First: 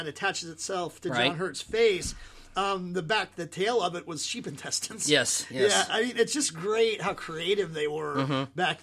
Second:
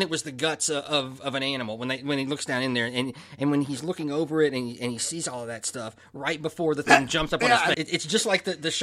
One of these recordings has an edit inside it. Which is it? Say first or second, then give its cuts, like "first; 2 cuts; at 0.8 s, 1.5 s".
second; 1 cut; at 7.7 s